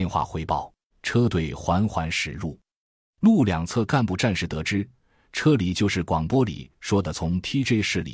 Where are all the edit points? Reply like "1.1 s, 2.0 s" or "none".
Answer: 0.9 s